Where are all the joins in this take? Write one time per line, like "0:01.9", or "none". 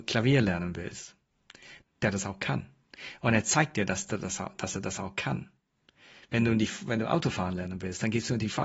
0:01.8